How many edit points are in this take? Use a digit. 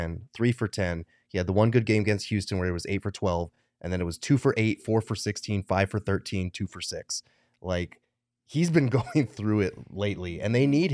0